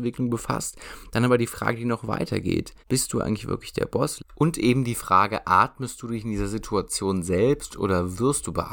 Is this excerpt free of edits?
no; 2 cuts; at 2.8 s, 4.2 s

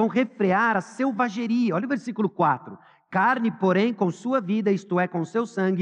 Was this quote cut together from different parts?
no; 0 cuts

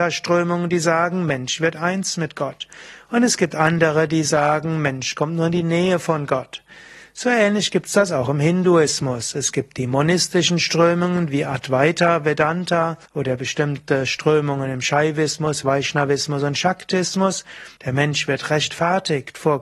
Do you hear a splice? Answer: yes; 2 cuts; at 13.1 s, 17.8 s

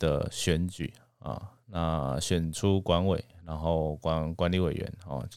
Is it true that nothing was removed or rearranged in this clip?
yes; 0 cuts

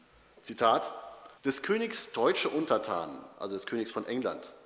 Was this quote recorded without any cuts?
no; 1 cut; at 1.4 s

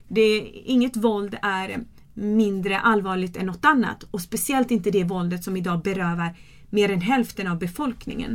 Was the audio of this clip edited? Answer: no; 0 cuts

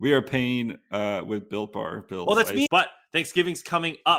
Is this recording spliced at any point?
yes; 1 cut; at 2.7 s

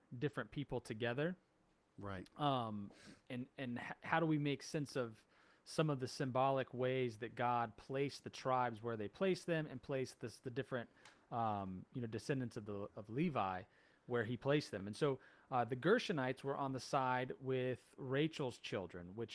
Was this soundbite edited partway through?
no; 0 cuts

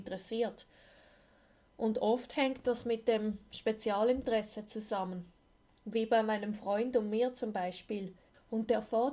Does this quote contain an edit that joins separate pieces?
no; 0 cuts

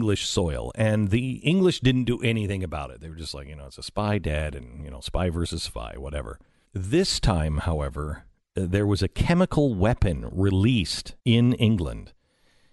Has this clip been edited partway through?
yes; 2 cuts; at 6.6 s, 11.2 s

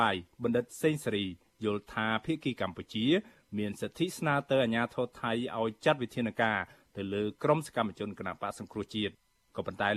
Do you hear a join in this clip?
no; 0 cuts

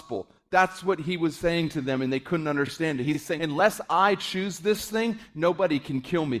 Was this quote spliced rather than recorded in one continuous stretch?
yes; 1 cut; at 3.4 s

